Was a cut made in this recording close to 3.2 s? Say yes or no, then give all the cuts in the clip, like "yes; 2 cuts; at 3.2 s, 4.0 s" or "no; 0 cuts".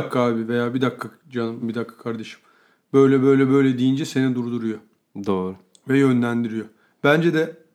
no; 1 cut; at 1.6 s